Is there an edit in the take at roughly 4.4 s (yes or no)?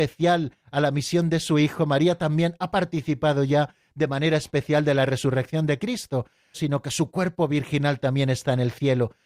no